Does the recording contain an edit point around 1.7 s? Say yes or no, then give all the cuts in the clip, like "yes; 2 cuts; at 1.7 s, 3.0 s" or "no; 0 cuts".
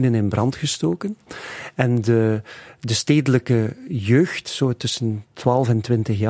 no; 0 cuts